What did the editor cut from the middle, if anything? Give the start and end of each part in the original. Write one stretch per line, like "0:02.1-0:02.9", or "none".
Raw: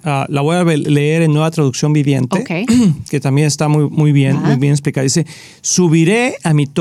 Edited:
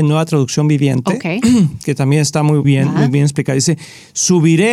0:03.9-0:04.1